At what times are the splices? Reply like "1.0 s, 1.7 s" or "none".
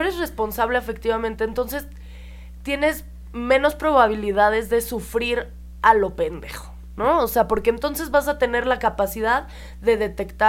none